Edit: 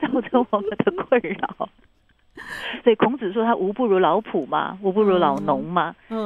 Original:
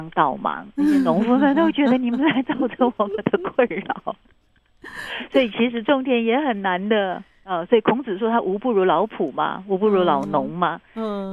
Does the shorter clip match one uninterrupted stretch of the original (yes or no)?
no